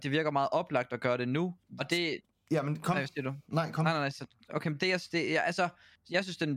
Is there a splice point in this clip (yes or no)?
yes